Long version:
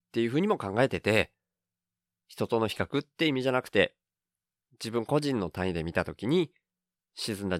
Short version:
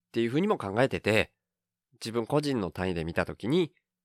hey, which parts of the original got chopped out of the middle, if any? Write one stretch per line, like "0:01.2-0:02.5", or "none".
0:01.8-0:04.6